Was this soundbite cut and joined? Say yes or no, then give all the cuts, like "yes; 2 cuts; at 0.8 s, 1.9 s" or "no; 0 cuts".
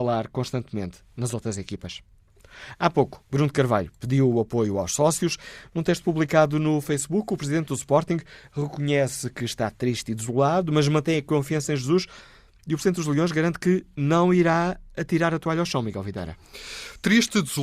no; 0 cuts